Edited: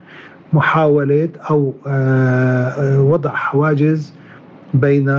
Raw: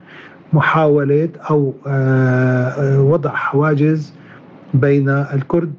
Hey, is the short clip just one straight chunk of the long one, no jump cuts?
yes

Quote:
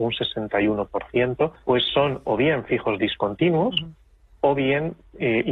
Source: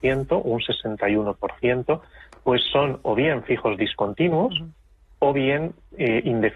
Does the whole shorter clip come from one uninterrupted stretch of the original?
no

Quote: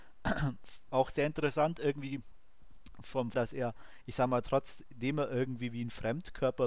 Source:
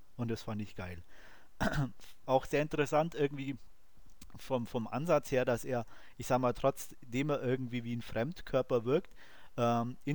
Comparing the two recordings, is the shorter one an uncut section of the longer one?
no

